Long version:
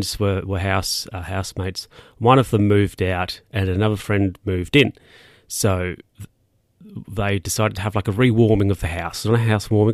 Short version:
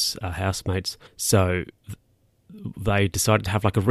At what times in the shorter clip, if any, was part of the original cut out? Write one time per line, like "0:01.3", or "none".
0:01.1